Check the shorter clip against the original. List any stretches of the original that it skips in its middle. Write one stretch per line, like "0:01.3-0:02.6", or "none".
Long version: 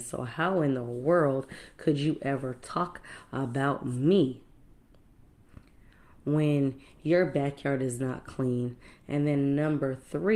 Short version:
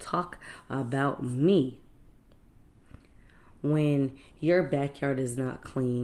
none